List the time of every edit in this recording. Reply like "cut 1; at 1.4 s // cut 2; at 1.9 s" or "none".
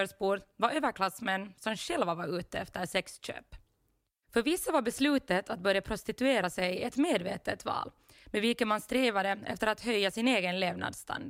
none